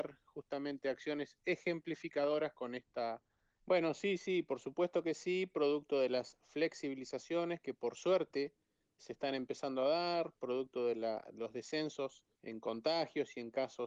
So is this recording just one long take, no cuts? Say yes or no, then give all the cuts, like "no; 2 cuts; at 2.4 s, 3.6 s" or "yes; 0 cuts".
no; 3 cuts; at 3.6 s, 9.0 s, 12.3 s